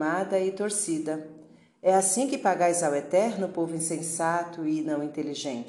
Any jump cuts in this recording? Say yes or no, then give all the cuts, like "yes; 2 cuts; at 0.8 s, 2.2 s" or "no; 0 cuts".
no; 0 cuts